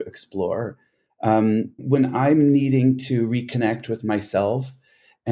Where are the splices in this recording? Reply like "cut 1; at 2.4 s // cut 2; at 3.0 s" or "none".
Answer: cut 1; at 1.8 s